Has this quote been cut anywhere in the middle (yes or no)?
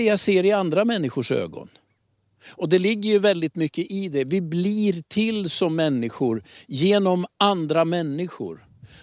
no